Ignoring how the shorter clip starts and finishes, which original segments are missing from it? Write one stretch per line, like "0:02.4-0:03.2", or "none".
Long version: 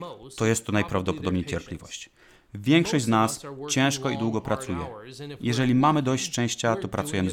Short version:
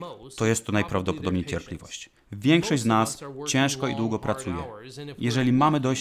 0:02.2-0:02.4